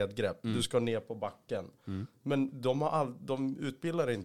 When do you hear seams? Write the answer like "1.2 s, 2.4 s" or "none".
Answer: none